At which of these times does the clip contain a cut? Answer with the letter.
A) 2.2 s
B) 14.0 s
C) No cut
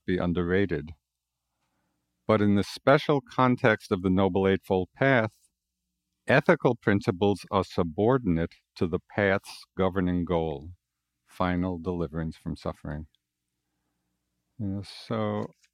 C